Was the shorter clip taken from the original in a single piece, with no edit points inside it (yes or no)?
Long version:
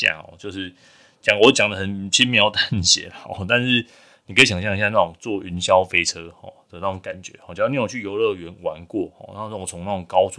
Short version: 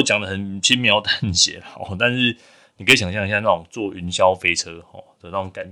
yes